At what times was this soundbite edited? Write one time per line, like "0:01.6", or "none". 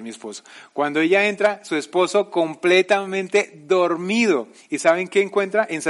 0:04.6